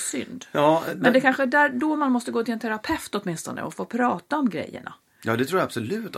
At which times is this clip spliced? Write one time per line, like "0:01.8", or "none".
none